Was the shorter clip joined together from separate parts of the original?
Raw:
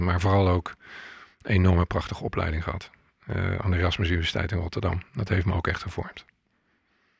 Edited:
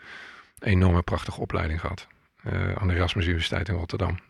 no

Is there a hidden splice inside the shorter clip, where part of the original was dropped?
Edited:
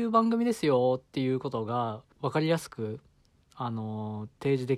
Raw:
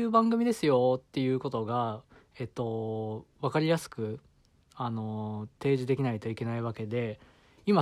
yes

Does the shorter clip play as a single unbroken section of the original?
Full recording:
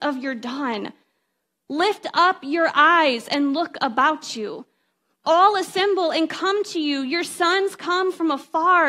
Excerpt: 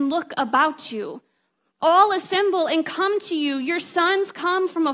yes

